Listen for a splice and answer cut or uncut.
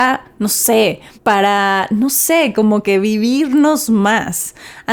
cut